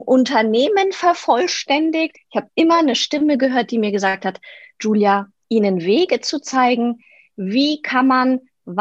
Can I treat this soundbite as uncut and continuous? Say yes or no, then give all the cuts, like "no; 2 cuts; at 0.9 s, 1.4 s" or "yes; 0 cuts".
no; 2 cuts; at 2.1 s, 5.4 s